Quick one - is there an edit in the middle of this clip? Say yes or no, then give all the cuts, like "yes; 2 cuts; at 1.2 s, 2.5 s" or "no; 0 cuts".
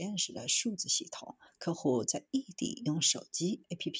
yes; 1 cut; at 1.5 s